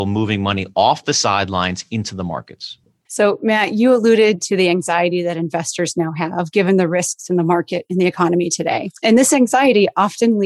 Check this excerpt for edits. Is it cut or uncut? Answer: uncut